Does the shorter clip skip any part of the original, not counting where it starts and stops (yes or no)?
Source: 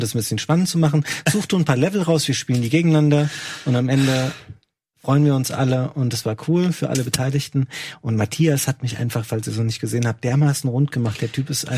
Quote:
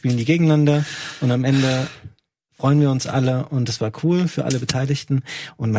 no